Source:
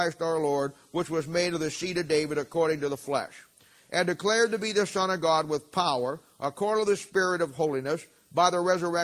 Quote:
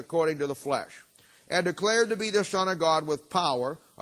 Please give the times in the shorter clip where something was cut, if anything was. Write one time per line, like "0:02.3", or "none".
none